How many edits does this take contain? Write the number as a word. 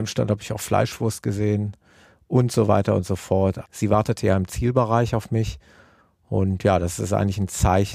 one